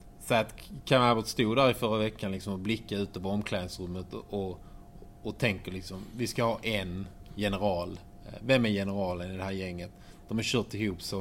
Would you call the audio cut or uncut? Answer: uncut